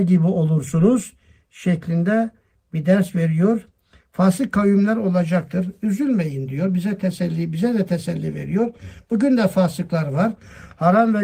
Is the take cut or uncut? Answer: uncut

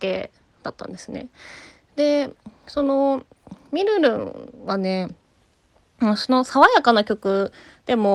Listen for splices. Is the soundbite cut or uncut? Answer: uncut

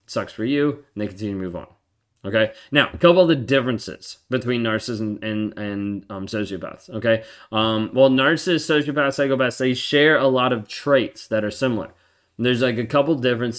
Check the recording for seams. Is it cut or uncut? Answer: uncut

